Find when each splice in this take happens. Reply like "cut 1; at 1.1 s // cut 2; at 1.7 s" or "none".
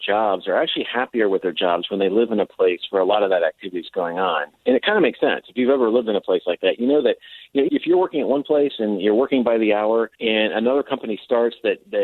cut 1; at 7.7 s // cut 2; at 10.1 s